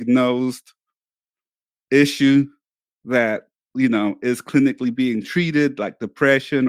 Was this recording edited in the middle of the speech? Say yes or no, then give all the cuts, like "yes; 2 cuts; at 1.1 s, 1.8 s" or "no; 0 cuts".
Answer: no; 0 cuts